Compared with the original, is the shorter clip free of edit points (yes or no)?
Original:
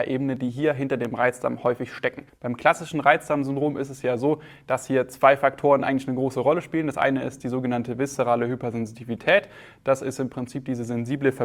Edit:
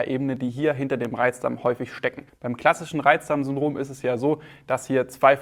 yes